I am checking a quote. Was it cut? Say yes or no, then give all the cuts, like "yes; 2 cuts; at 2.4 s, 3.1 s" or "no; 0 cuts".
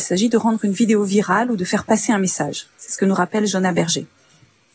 no; 0 cuts